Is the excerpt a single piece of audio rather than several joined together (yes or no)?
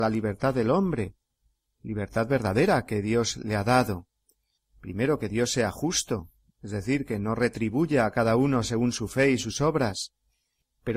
no